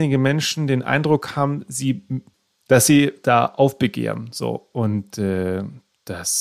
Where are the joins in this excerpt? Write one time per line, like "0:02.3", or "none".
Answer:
none